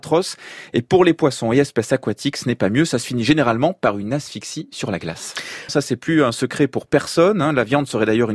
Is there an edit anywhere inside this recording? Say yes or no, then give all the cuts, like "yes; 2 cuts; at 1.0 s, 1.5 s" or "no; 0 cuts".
yes; 1 cut; at 5.7 s